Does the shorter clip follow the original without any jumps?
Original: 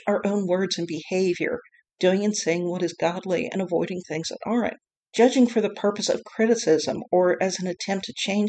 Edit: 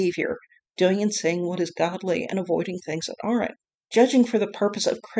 yes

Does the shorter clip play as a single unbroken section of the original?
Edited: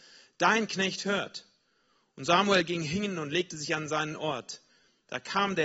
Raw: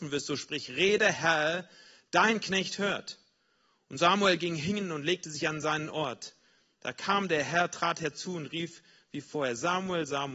yes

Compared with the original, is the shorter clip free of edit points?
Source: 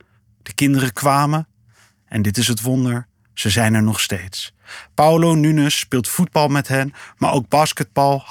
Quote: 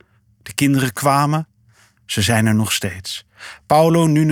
no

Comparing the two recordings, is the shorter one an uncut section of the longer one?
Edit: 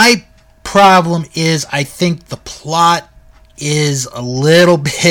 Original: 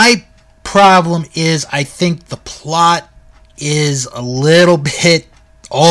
yes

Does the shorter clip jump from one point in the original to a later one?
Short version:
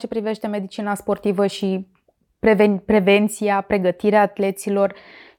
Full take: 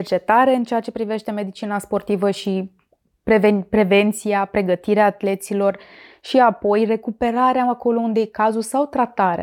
no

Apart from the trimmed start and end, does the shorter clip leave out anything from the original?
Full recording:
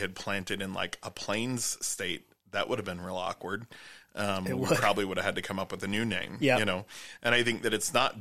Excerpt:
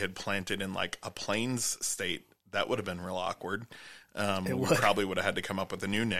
no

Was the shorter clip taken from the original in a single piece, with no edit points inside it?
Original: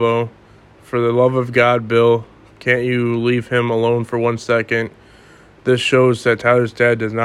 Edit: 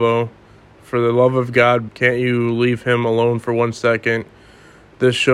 no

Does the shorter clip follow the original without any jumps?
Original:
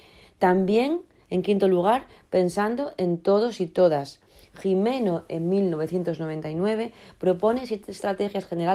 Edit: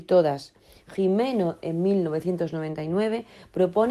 yes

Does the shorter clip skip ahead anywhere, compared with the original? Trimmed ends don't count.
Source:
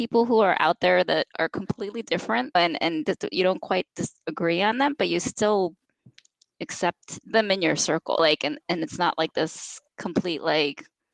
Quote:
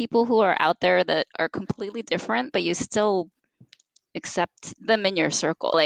yes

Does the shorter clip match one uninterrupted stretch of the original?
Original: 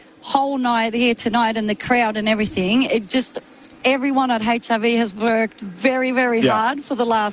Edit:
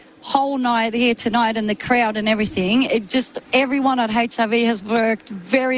no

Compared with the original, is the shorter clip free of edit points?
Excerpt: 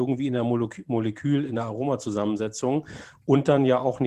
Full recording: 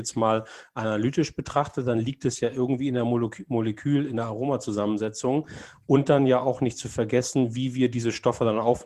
yes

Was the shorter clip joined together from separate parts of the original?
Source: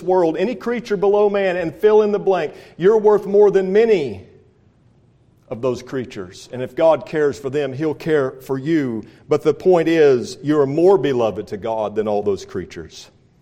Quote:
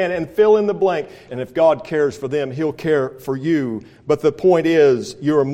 yes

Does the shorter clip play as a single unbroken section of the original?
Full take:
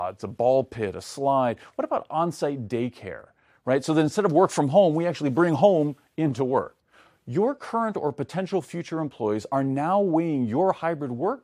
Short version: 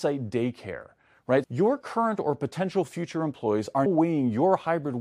no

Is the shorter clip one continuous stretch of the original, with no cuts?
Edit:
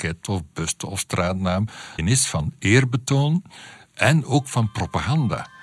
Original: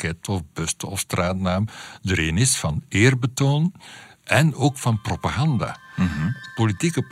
no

